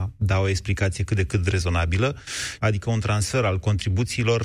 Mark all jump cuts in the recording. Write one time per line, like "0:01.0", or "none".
0:02.6